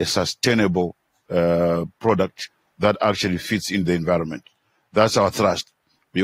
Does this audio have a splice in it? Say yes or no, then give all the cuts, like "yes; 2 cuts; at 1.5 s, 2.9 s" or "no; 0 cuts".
no; 0 cuts